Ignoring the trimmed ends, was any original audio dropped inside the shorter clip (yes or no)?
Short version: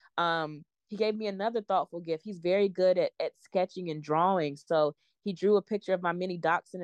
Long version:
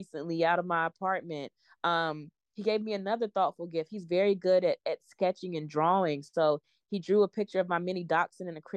no